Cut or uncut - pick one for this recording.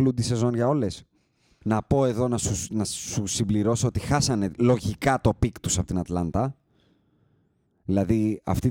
cut